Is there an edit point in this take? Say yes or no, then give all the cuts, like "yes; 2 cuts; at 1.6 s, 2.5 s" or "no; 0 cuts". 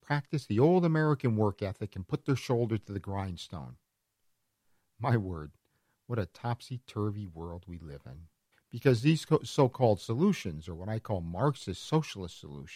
yes; 1 cut; at 8.5 s